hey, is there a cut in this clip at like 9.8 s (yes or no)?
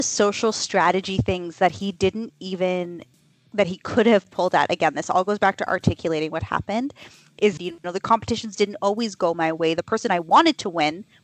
no